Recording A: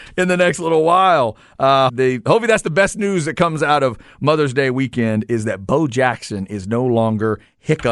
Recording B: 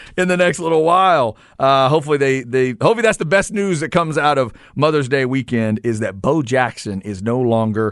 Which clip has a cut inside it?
A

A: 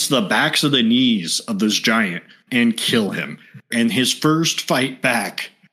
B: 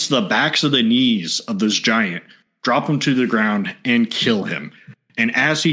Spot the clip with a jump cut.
A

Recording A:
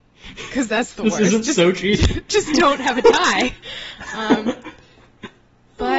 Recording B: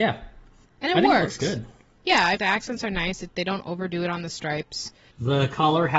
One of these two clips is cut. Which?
B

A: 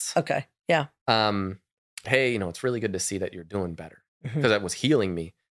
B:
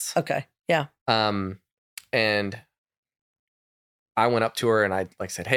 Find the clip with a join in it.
A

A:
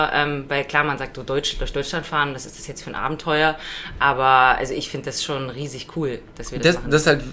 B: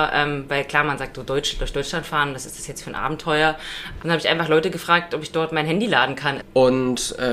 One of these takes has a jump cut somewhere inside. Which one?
B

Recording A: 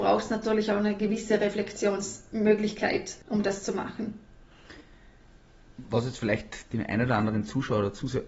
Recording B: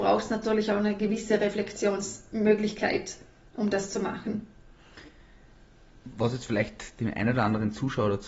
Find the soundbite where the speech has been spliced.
A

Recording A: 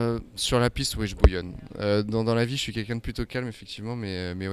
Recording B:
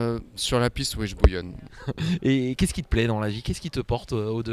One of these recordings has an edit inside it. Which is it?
B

